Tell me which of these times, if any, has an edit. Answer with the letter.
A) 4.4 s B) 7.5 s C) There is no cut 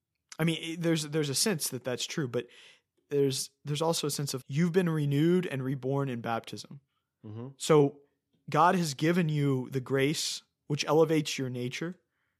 A